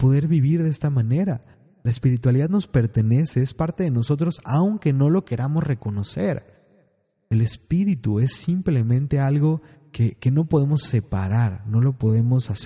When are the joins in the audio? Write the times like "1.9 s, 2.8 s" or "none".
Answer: none